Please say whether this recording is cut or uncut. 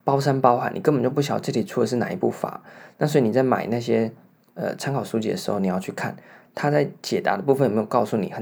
uncut